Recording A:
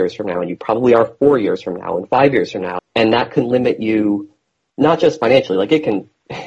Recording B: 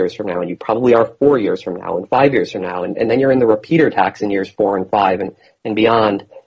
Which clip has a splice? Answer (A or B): A